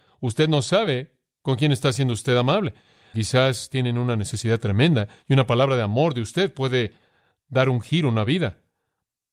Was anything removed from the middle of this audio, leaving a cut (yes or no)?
yes